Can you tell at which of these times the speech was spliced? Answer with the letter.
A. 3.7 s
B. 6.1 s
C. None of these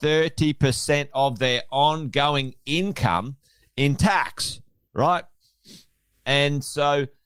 C